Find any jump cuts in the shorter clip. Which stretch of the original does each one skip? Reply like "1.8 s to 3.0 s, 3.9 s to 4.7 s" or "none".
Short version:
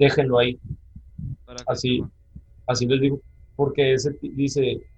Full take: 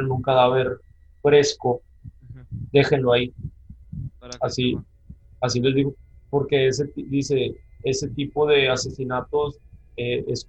none